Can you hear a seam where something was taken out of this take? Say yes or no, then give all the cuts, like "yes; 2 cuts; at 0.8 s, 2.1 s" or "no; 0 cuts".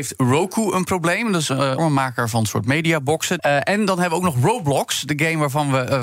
yes; 2 cuts; at 1.8 s, 3.4 s